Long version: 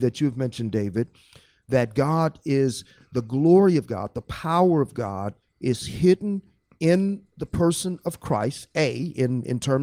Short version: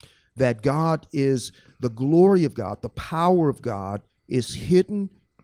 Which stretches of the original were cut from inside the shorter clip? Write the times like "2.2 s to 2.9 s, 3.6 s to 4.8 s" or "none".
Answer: none